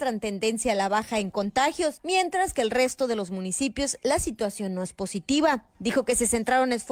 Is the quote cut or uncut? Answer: uncut